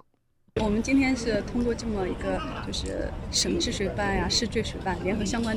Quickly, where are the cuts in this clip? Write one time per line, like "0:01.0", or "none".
none